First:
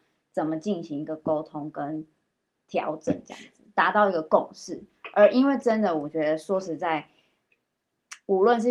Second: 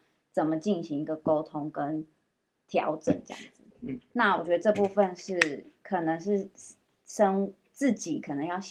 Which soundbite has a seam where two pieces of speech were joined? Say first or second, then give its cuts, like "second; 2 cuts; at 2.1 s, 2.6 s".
second; 1 cut; at 3.7 s